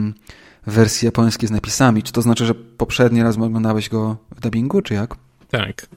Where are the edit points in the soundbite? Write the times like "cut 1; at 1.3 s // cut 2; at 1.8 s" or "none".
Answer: cut 1; at 4.8 s

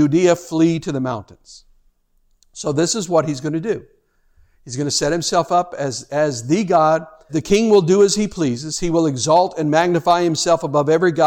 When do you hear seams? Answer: cut 1; at 7.3 s

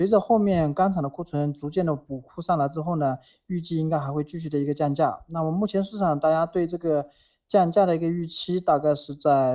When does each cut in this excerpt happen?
none

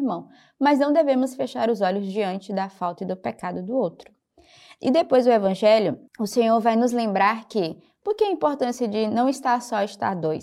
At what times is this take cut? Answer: cut 1; at 6.1 s

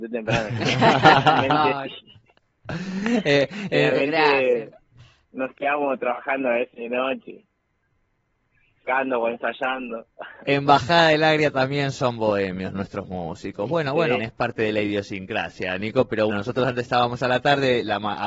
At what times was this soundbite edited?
cut 1; at 8.9 s // cut 2; at 14.2 s // cut 3; at 16.3 s

